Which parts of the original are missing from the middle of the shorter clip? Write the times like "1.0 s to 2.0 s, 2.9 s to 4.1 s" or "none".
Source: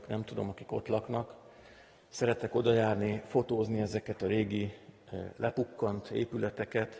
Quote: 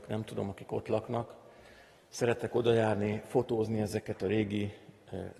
none